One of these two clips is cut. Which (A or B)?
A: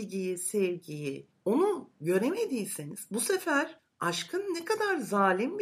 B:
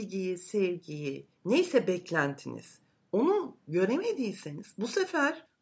A